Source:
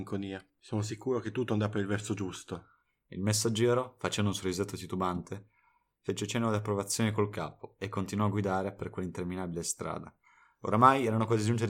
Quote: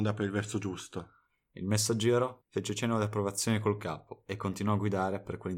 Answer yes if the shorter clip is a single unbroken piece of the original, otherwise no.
no